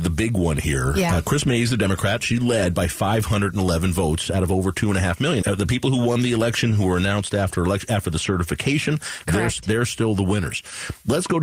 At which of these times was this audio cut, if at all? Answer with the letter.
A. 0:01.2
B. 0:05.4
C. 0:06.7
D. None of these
B